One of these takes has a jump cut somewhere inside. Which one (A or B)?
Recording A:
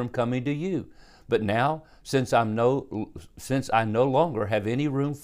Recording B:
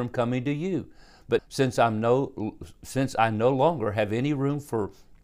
B